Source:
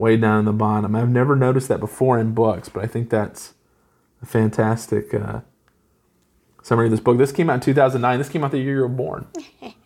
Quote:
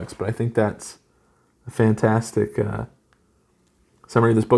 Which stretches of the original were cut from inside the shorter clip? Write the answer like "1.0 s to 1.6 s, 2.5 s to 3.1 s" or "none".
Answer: none